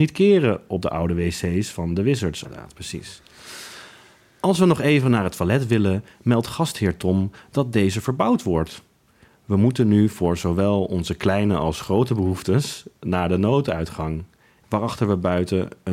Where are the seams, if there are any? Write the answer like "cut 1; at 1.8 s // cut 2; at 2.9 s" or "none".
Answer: cut 1; at 2.4 s

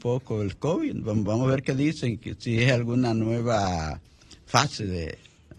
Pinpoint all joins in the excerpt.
none

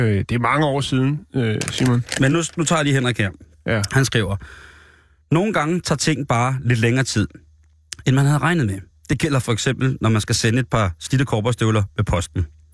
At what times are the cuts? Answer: none

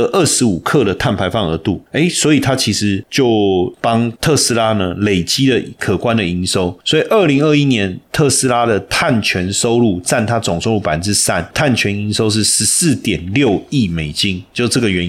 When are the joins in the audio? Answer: none

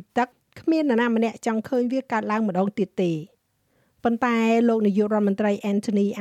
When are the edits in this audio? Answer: none

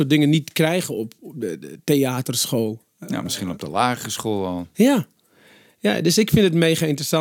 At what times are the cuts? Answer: none

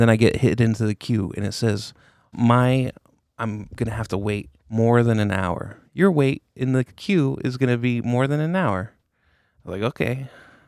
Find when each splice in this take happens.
cut 1; at 2.3 s // cut 2; at 4.6 s // cut 3; at 5.9 s

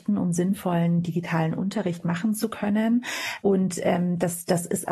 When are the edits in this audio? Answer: cut 1; at 3.4 s

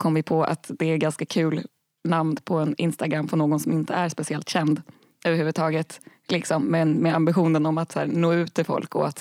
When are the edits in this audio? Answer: none

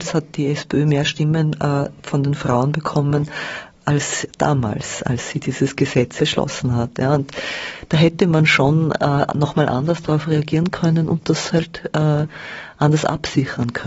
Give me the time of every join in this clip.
cut 1; at 6.2 s

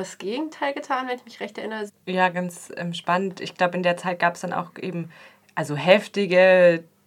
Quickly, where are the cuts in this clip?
cut 1; at 1.9 s

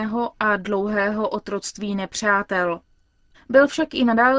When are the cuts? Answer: cut 1; at 3.3 s

